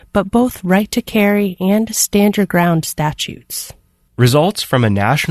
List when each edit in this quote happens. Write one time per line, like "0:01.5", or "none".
0:04.1